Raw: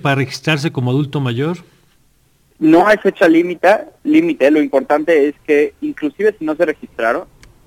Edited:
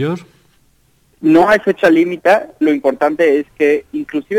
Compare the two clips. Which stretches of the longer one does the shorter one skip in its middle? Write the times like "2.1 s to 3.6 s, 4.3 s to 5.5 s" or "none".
4.0 s to 4.5 s